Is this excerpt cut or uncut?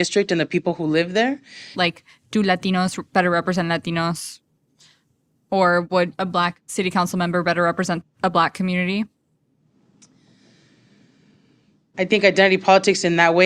cut